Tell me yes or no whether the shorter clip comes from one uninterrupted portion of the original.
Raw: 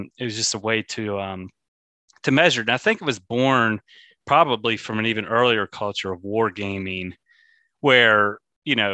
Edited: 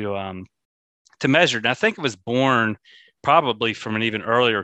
yes